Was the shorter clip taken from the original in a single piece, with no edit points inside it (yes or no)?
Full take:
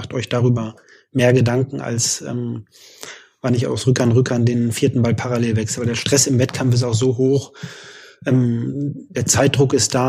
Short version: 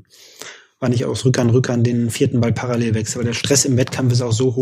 yes